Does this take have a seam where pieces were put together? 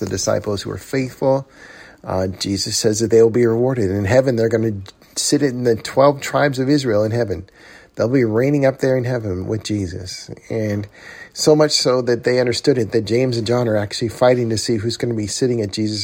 no; 0 cuts

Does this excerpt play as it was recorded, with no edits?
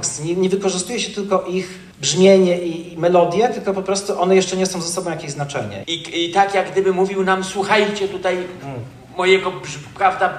no; 2 cuts; at 1.9 s, 5.8 s

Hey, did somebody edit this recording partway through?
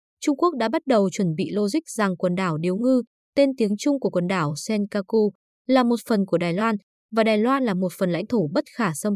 no; 0 cuts

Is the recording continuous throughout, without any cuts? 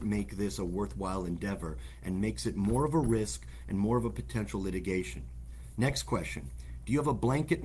yes; 0 cuts

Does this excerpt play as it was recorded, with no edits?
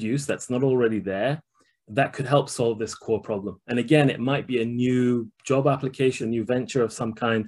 no; 1 cut; at 6.2 s

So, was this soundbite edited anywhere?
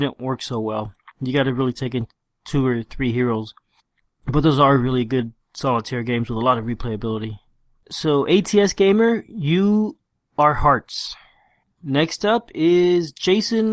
no; 0 cuts

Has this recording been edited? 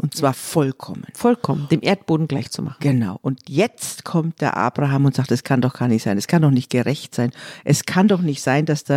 no; 0 cuts

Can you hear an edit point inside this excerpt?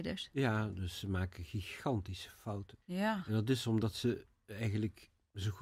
yes; 1 cut; at 2.8 s

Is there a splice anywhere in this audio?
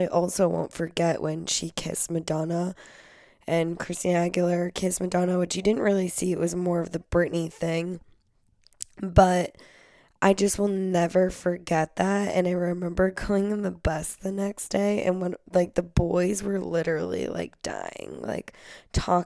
no; 0 cuts

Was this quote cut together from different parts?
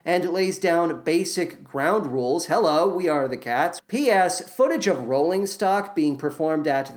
yes; 1 cut; at 3.8 s

